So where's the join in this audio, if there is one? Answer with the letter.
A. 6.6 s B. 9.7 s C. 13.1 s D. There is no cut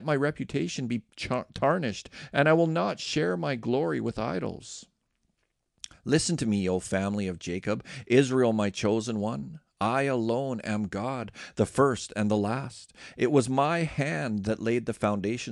D